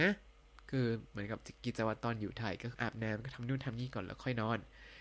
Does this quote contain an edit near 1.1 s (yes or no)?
no